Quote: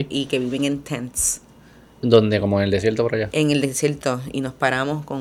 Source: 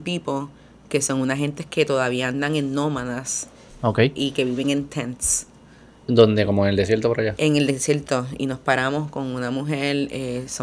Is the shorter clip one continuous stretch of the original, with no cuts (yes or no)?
yes